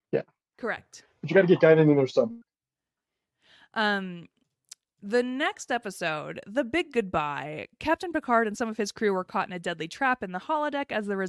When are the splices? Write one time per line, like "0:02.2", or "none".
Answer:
none